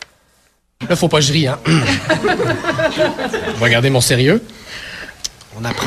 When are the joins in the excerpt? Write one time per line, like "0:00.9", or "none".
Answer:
none